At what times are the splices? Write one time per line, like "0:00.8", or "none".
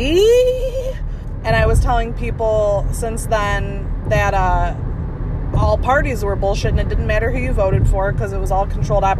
0:01.4